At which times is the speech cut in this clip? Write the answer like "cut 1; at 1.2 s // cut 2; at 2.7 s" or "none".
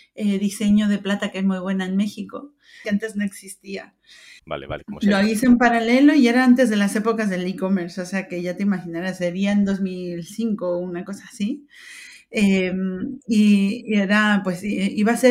cut 1; at 2.8 s // cut 2; at 4.4 s